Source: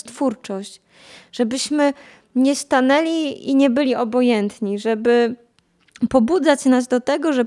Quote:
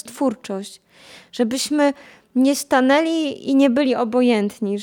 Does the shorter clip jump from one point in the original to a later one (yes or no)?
no